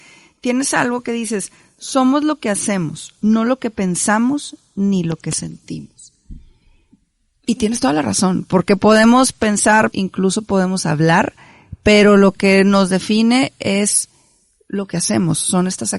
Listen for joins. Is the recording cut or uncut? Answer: cut